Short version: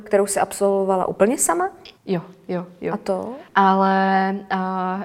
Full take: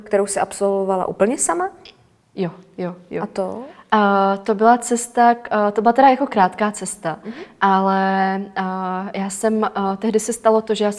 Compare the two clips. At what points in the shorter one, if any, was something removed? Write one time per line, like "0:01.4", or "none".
0:02.0
0:03.5